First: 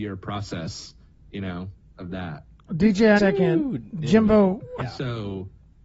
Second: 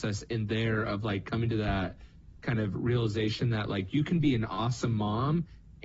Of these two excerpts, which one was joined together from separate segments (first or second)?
first